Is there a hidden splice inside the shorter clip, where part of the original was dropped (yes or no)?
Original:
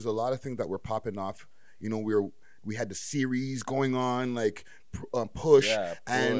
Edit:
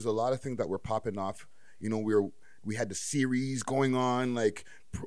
no